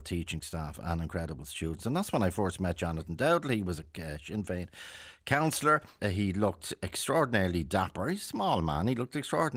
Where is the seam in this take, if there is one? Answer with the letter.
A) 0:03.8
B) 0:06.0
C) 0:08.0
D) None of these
B